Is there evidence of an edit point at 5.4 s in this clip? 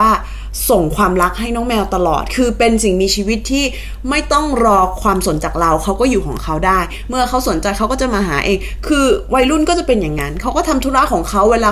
yes; 1 cut; at 5.4 s

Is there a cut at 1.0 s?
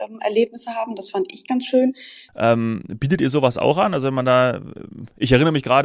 no; 1 cut; at 2.3 s

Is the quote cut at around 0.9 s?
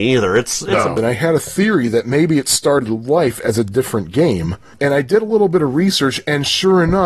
yes; 1 cut; at 0.9 s

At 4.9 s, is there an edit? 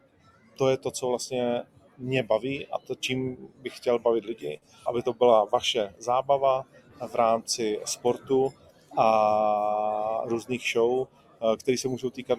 yes; 1 cut; at 4.9 s

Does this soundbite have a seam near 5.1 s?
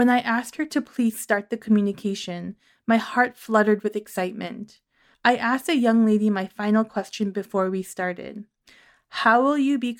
yes; 1 cut; at 5.1 s

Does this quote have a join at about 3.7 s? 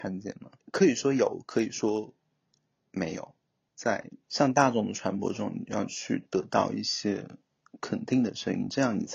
yes; 1 cut; at 3.7 s

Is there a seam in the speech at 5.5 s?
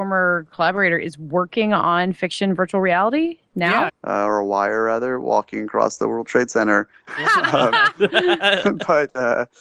no; 2 cuts; at 3.9 s, 7.1 s

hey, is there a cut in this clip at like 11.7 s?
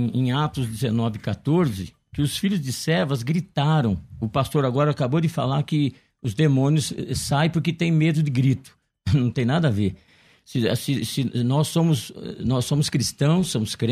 no; 0 cuts

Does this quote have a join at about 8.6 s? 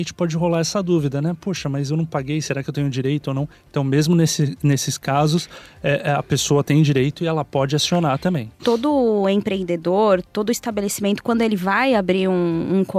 yes; 1 cut; at 8.6 s

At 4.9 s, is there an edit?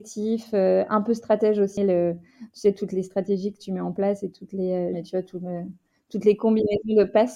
yes; 2 cuts; at 1.8 s, 4.9 s

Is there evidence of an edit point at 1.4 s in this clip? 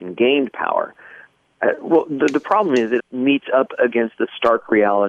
yes; 2 cuts; at 1.4 s, 3.0 s

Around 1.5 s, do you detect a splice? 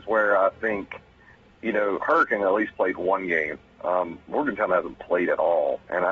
no; 0 cuts

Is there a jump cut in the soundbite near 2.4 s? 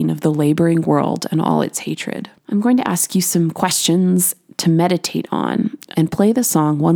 yes; 2 cuts; at 2.4 s, 5.9 s

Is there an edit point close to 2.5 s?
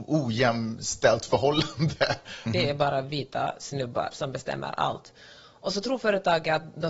yes; 1 cut; at 2.5 s

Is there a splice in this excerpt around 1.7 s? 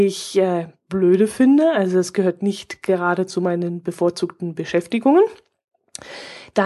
no; 0 cuts

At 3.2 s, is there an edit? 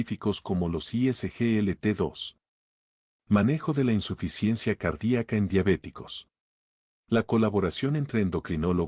yes; 2 cuts; at 3.2 s, 7.0 s

